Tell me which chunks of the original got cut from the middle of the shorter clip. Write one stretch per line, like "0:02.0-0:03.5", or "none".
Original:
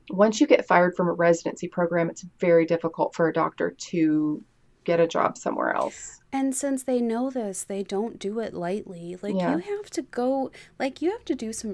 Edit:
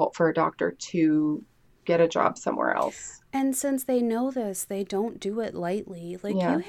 none